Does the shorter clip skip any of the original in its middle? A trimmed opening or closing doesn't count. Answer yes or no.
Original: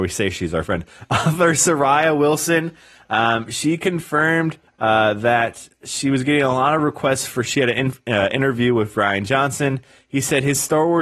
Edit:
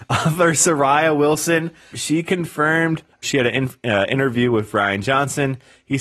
yes